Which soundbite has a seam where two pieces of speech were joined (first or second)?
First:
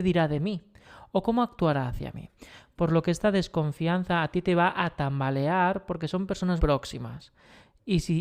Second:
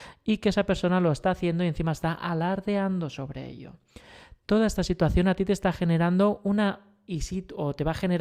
first